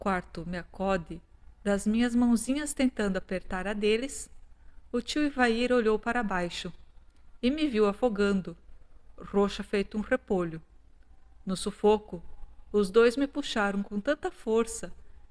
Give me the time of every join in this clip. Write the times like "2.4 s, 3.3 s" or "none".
none